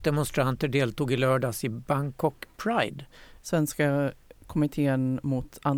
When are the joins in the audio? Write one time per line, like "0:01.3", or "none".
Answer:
0:03.4